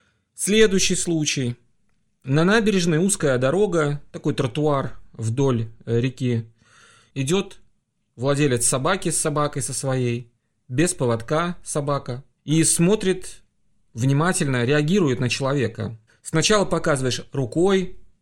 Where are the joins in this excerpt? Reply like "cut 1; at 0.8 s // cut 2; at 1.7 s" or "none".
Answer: cut 1; at 12.4 s // cut 2; at 16.1 s